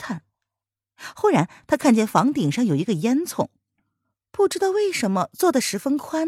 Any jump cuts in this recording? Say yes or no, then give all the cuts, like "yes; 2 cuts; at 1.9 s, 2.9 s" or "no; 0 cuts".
no; 0 cuts